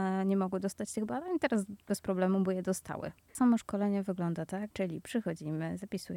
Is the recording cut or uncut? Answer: cut